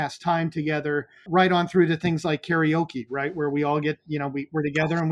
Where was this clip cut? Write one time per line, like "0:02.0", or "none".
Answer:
0:01.3